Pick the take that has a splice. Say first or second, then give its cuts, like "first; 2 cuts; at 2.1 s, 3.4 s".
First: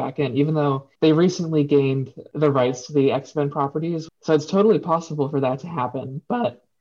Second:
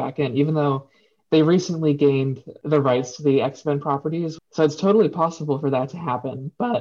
first; 1 cut; at 0.9 s